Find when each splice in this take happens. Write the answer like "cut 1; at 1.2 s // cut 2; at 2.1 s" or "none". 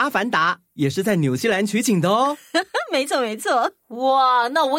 none

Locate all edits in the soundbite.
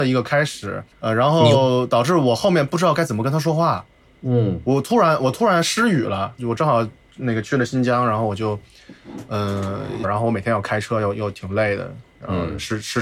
cut 1; at 0.9 s // cut 2; at 6.4 s // cut 3; at 10.0 s

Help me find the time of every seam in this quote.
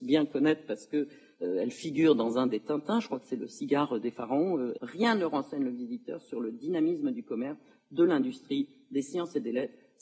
cut 1; at 4.8 s

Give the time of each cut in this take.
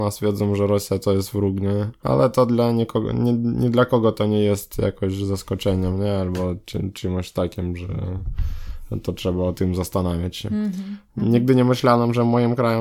cut 1; at 2.0 s

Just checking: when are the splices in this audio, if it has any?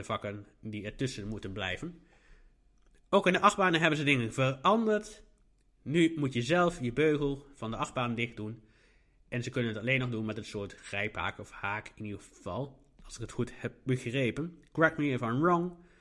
none

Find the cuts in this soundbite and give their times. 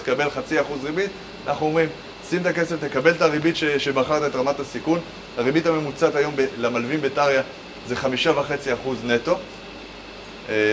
none

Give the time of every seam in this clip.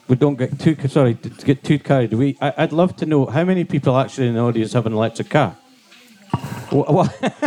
cut 1; at 6.3 s

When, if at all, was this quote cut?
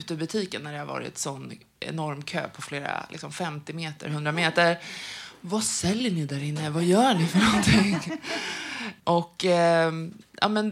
cut 1; at 9.0 s

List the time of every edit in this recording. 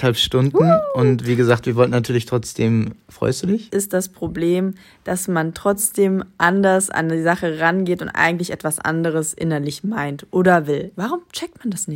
cut 1; at 3.7 s // cut 2; at 10.9 s

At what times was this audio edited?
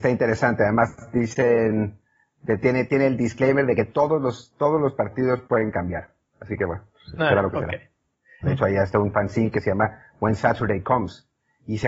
cut 1; at 8.4 s

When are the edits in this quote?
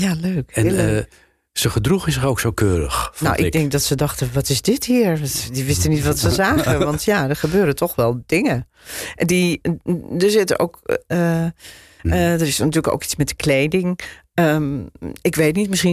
cut 1; at 9.6 s // cut 2; at 12.0 s

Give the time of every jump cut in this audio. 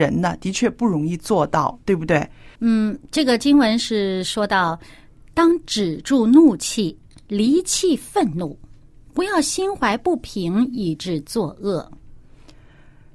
cut 1; at 2.6 s

